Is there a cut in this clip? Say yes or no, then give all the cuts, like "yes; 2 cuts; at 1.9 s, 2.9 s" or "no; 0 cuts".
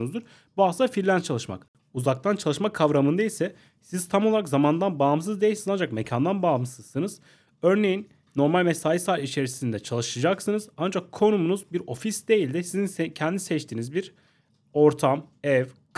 no; 0 cuts